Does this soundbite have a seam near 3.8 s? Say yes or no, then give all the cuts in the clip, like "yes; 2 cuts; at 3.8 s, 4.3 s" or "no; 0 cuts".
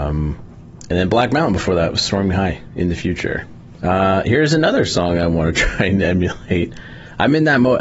yes; 1 cut; at 3.8 s